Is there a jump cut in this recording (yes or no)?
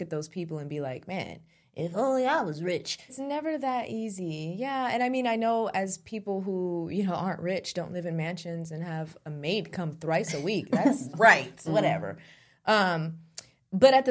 yes